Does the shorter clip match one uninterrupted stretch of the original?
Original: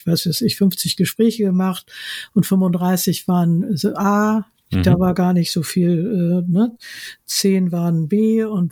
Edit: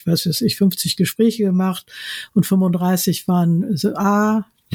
yes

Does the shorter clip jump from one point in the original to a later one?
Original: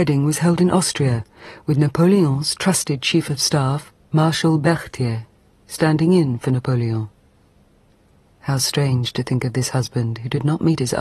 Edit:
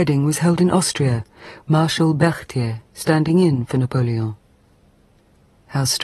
yes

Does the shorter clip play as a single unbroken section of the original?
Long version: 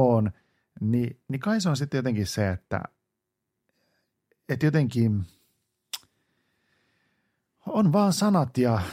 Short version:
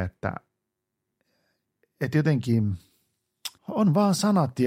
no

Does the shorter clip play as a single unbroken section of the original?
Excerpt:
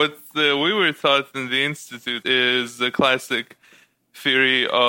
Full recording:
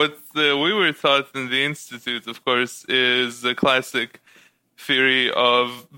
no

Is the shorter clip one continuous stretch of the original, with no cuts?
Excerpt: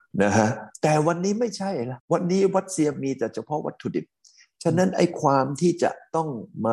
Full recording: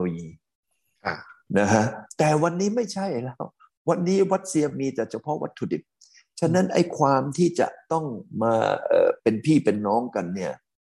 no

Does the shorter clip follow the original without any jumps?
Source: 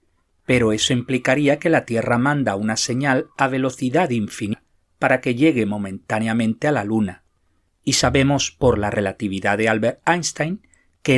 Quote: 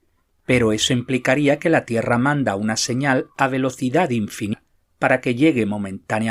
yes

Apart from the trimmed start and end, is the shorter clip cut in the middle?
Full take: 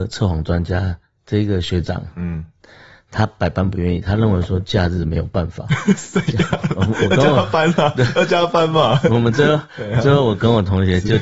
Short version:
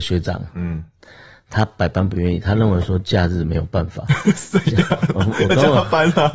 no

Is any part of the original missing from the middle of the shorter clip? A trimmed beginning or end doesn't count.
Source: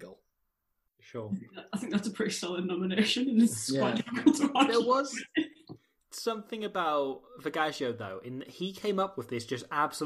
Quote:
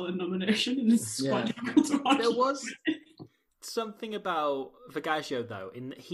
no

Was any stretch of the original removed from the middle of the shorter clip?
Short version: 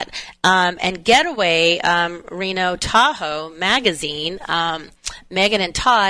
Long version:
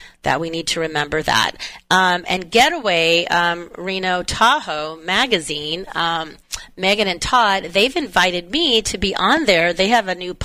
no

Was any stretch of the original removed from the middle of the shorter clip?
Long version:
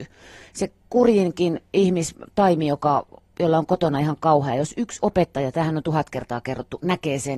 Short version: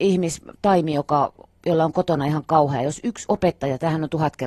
no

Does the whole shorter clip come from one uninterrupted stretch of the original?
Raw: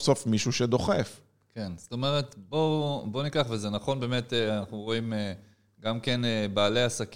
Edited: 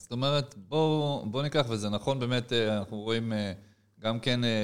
yes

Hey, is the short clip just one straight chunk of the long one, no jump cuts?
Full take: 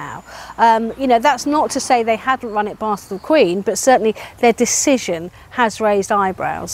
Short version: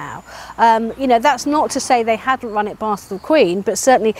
yes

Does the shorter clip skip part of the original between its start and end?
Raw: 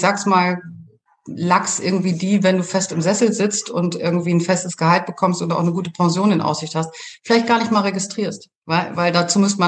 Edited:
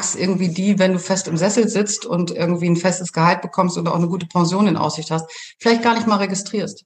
no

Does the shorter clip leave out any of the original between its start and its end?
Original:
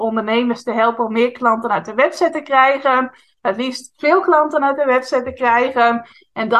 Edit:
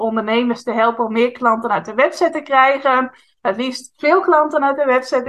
no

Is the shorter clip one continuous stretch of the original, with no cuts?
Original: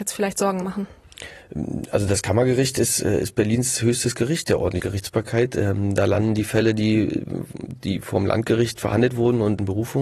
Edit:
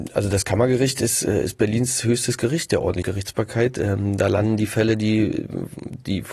yes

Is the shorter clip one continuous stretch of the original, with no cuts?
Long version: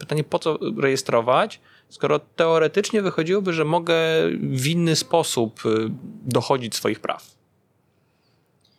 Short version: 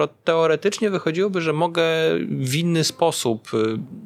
yes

